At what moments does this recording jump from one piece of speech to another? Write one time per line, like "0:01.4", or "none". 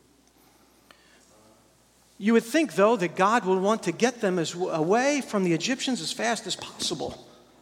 none